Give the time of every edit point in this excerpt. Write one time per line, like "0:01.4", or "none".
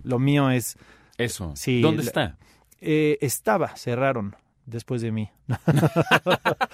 none